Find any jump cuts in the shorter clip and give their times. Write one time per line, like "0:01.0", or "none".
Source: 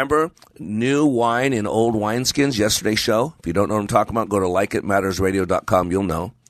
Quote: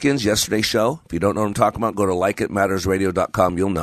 none